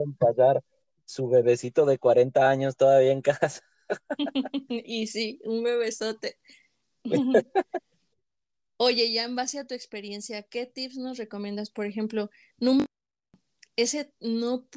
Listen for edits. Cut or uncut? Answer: uncut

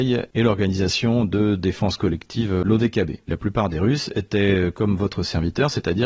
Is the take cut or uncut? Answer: cut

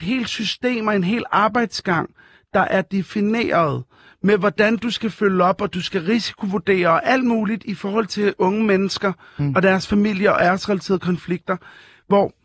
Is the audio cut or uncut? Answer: uncut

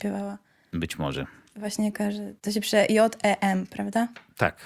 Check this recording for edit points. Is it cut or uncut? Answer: cut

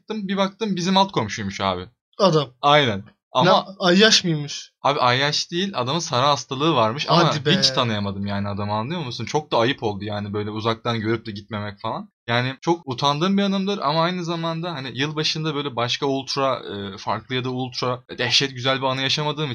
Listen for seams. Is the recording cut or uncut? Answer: uncut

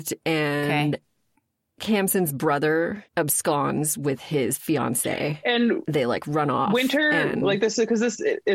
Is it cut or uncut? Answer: cut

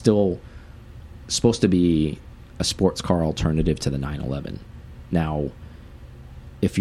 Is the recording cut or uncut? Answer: uncut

